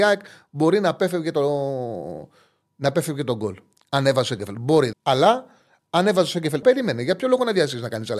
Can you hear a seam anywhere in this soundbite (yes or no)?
yes